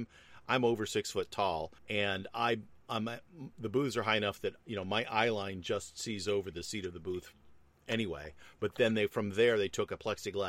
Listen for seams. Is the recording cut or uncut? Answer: cut